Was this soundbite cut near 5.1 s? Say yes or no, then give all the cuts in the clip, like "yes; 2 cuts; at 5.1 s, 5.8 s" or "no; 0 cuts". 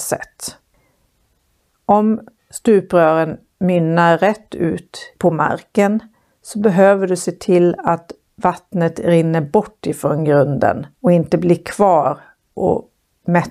yes; 2 cuts; at 5.1 s, 10.9 s